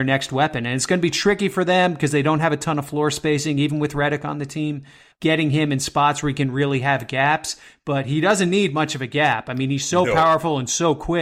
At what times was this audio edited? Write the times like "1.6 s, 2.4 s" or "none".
none